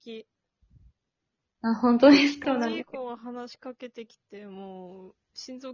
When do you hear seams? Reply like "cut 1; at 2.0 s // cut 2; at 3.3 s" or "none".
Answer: cut 1; at 2.4 s